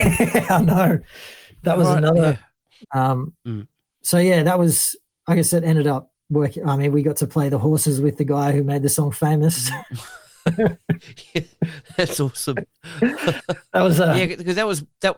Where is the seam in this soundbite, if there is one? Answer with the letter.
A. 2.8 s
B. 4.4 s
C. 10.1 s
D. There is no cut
A